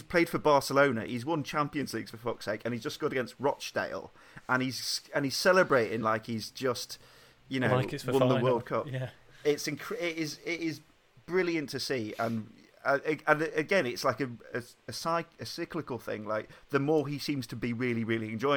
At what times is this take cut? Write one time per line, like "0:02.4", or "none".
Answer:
none